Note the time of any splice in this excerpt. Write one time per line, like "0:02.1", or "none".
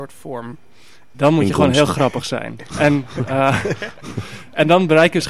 0:01.1